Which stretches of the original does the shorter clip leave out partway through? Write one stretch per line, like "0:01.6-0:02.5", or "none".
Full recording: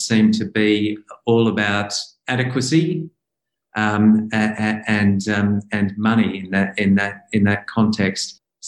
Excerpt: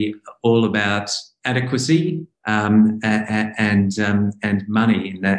0:03.2-0:03.6